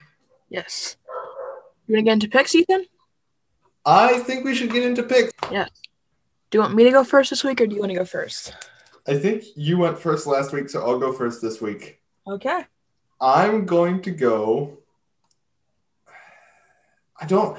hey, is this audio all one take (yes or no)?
no